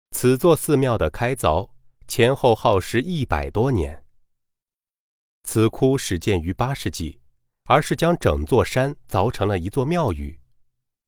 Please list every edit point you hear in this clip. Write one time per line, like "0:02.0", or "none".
0:05.3
0:07.6